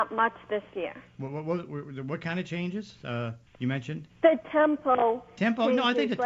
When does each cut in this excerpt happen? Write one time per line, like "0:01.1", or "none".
0:03.5